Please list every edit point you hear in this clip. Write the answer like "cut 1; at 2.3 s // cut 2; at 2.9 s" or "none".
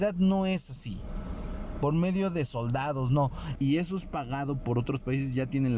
cut 1; at 3.6 s